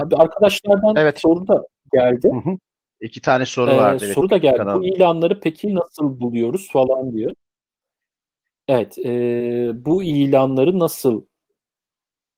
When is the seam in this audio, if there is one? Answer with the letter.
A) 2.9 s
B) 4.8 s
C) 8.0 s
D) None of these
A